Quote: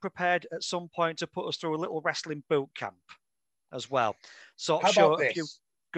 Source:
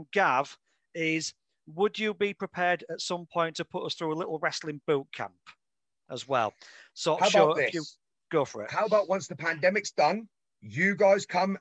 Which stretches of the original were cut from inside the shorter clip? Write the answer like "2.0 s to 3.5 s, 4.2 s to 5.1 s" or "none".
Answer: none